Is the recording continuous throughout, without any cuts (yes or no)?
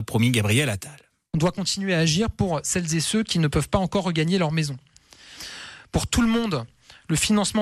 yes